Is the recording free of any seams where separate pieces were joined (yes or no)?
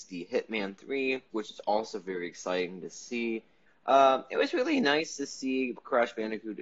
no